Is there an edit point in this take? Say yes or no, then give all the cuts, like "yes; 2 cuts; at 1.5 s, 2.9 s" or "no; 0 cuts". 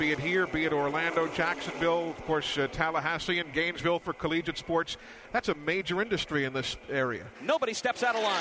yes; 1 cut; at 7.3 s